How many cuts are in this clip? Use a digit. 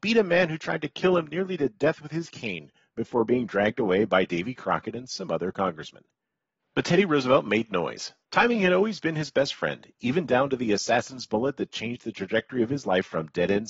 2